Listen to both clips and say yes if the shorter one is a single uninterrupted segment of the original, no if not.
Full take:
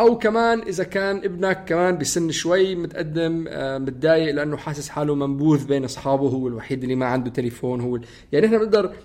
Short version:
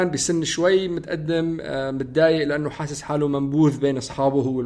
yes